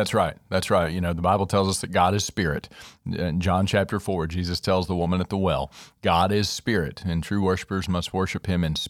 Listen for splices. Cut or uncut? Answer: uncut